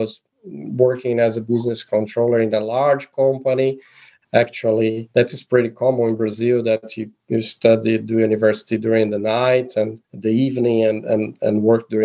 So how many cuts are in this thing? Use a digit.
2